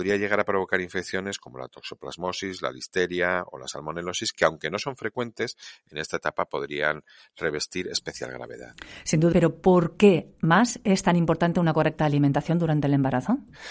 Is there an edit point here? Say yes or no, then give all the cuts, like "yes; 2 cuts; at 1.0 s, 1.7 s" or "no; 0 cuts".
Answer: yes; 1 cut; at 9.3 s